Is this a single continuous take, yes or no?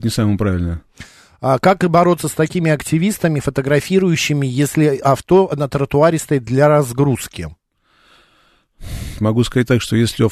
no